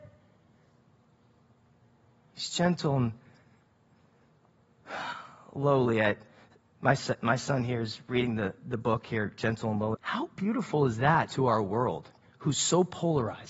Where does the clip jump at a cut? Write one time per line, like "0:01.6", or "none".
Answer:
0:09.9